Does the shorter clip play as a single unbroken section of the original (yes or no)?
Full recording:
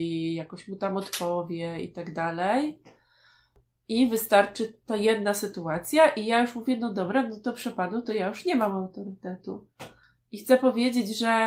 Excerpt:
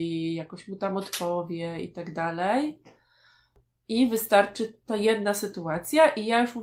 yes